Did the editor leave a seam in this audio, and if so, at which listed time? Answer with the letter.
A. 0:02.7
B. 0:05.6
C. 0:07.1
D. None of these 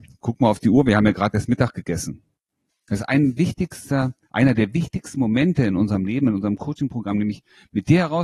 A